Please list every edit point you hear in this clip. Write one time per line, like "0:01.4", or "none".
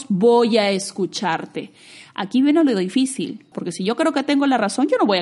0:03.5